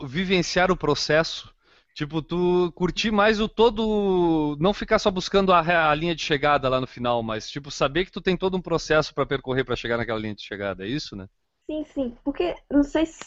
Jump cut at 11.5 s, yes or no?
no